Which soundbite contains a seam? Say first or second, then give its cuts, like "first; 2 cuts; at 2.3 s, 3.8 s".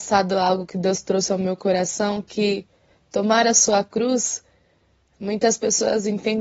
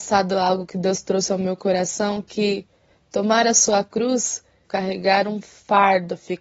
second; 1 cut; at 4.6 s